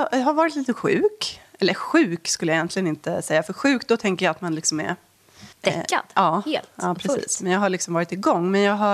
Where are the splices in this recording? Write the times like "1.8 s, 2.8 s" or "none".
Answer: 5.5 s